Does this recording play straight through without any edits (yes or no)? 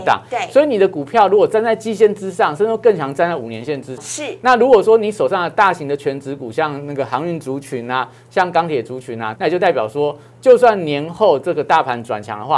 no